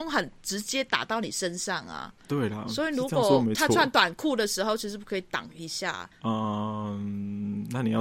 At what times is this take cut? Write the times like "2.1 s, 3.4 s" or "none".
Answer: none